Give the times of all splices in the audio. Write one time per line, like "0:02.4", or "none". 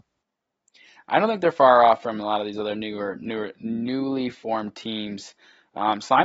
none